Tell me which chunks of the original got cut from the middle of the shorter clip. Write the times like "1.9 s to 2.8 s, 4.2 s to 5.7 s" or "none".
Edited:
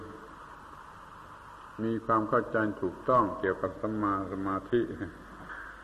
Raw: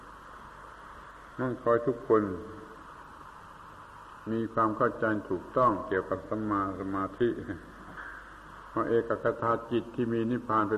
none